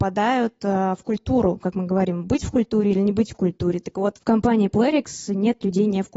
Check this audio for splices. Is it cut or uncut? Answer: uncut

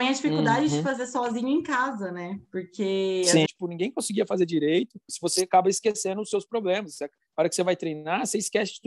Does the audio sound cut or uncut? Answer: cut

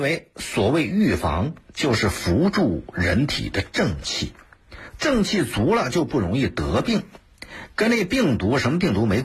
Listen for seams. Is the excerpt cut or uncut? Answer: uncut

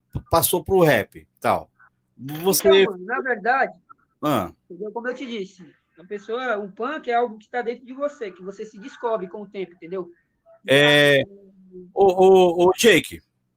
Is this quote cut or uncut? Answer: cut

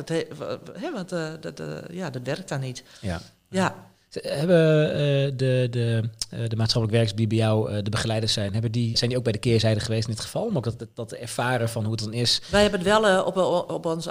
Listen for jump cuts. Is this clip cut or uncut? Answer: cut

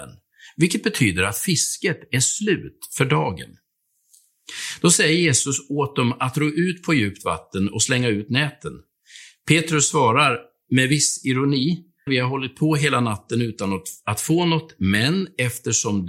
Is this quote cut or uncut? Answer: cut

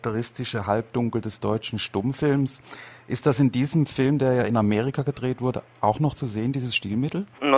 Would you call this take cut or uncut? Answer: uncut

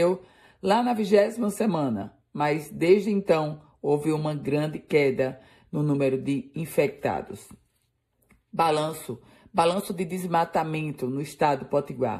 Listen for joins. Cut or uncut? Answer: uncut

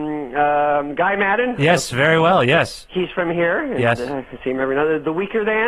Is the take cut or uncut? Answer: uncut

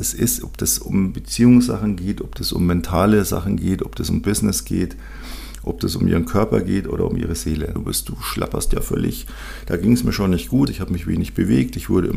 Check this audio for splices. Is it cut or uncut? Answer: cut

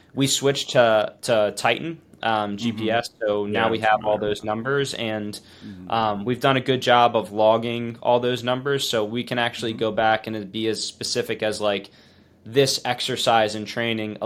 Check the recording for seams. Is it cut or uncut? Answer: uncut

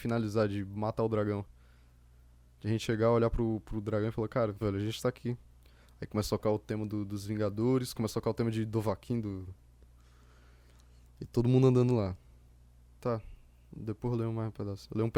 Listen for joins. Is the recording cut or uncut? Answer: cut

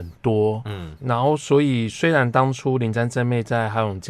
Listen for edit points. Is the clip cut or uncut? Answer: cut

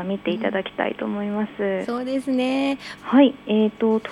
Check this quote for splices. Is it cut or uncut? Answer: cut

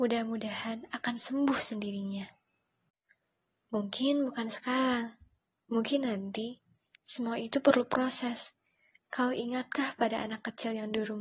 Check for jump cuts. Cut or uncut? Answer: uncut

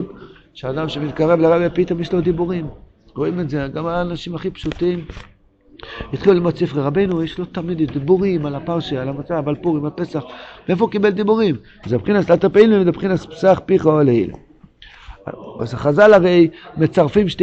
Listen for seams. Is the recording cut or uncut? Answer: cut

